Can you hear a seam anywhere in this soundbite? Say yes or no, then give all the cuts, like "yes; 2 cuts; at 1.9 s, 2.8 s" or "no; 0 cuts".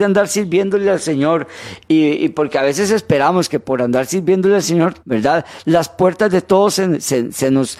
yes; 1 cut; at 5.0 s